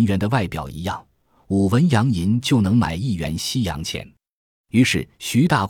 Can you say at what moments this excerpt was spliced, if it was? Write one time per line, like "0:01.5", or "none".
none